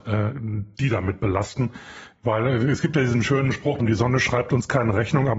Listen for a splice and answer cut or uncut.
cut